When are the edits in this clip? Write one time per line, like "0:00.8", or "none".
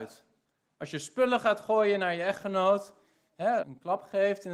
0:03.6